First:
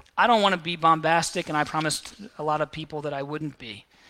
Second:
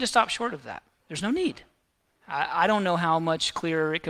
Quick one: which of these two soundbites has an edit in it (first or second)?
second